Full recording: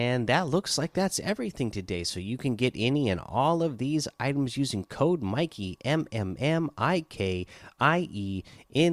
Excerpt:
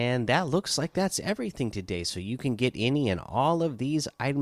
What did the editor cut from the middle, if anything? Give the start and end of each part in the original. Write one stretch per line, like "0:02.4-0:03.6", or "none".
none

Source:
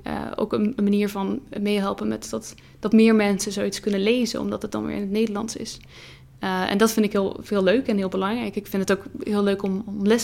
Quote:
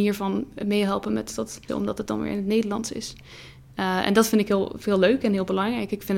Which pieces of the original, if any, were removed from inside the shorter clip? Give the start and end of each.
0:02.6-0:04.3

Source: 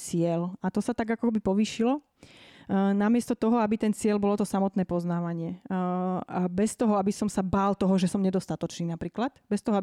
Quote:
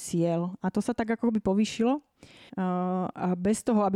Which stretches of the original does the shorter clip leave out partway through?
0:02.5-0:05.6

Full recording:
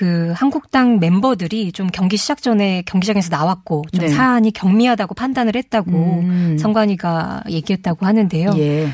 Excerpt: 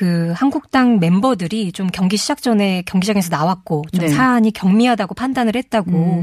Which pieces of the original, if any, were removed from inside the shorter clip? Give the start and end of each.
none

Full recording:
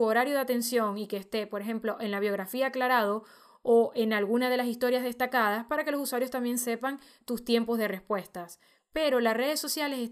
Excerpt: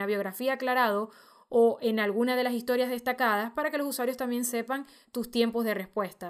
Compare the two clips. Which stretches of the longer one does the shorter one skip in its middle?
none

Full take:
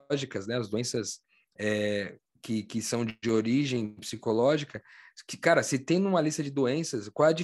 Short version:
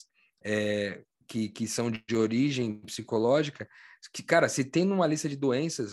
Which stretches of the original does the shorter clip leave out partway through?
none

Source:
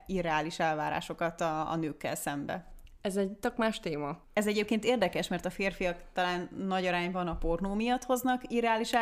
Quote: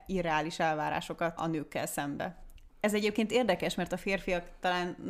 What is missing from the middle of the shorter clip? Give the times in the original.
0:01.4-0:01.7
0:03.0-0:04.2

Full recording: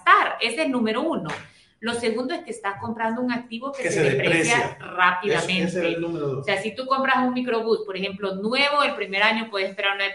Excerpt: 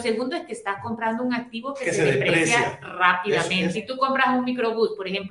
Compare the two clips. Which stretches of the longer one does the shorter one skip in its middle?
0:05.7-0:06.6

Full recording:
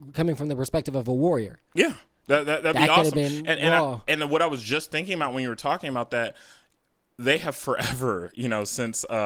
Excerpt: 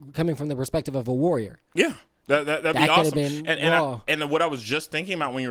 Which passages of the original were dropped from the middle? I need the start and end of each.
none

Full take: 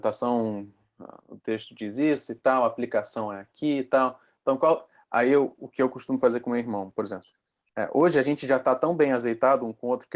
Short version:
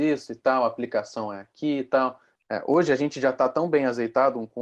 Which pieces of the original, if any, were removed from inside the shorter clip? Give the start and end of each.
0:04.3-0:07.6

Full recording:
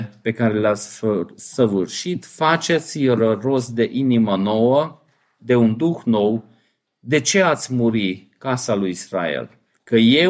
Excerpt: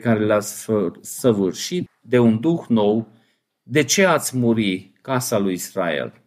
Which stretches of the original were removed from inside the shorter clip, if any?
0:02.2-0:05.2

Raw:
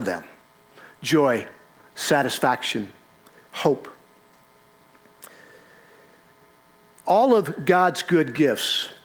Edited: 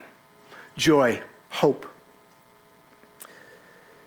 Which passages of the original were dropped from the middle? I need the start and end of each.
0:01.7-0:03.5

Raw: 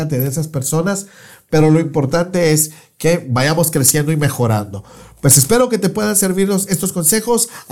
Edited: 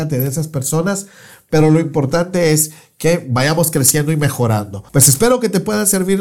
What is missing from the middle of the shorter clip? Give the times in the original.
0:04.9-0:05.2

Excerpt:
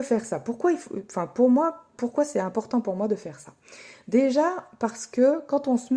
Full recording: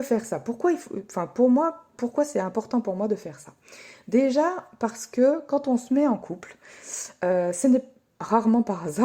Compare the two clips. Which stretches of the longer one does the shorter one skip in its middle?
none

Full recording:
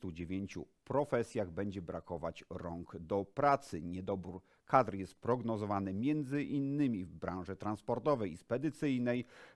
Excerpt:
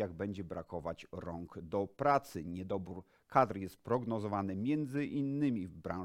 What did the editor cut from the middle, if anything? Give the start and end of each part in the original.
none

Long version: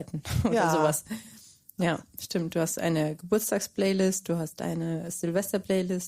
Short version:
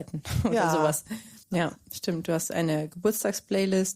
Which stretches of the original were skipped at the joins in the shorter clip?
0:01.4-0:01.7

